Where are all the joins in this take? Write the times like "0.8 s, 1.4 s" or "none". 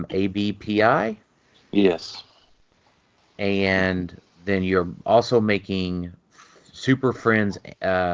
none